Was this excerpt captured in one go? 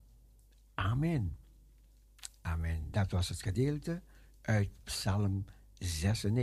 yes; 0 cuts

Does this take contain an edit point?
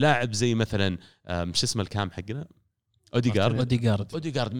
no; 0 cuts

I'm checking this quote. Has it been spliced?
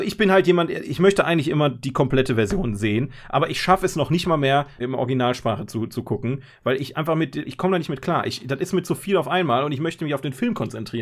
yes; 2 cuts; at 4.8 s, 7.4 s

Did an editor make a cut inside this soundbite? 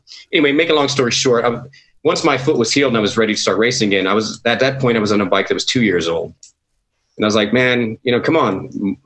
no; 0 cuts

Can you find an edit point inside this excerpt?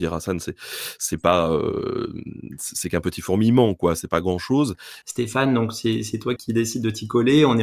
yes; 2 cuts; at 5.0 s, 6.4 s

